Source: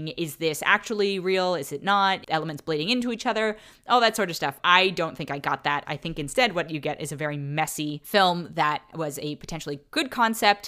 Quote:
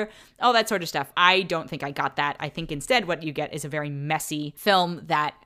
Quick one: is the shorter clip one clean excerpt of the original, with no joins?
yes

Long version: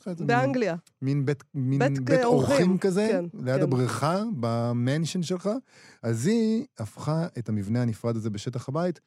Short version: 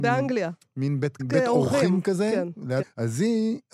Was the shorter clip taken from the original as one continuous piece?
no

